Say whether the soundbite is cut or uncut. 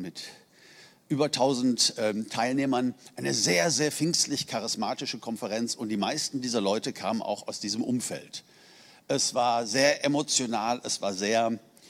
uncut